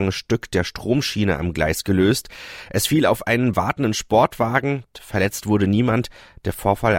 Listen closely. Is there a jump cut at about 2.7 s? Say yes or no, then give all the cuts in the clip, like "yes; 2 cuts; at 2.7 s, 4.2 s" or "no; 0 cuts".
no; 1 cut; at 4.9 s